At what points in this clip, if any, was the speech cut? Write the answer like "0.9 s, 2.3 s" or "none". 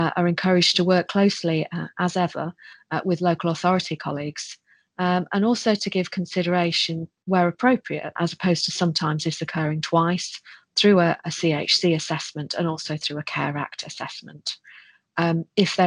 8.2 s